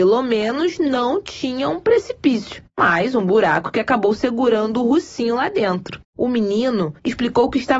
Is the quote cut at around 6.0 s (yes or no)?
yes